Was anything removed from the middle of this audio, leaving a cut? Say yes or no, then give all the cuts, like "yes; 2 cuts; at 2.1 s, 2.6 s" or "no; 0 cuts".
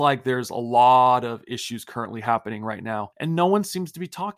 yes; 1 cut; at 3.1 s